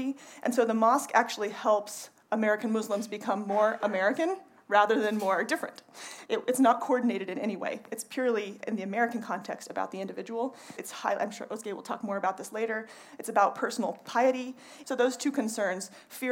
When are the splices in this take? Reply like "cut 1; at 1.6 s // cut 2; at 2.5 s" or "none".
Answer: cut 1; at 6.3 s // cut 2; at 10.8 s // cut 3; at 14.8 s